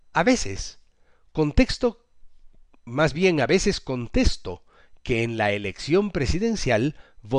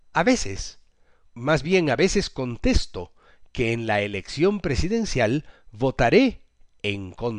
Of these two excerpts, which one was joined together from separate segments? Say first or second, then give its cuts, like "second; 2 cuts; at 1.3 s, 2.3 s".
second; 1 cut; at 1.3 s